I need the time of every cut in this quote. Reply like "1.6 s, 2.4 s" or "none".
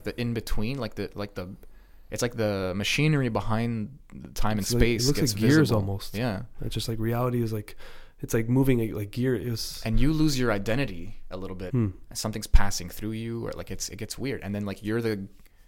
11.7 s